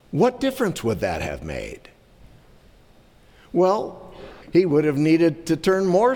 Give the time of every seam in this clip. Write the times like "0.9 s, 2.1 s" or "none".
4.4 s